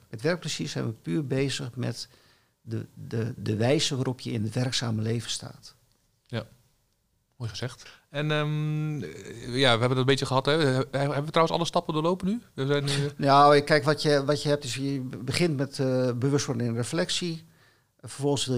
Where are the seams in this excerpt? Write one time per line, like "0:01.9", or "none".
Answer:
0:03.4